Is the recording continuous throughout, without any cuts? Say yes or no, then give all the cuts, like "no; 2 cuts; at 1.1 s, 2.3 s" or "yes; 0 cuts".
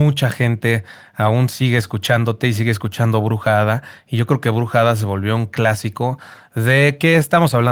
yes; 0 cuts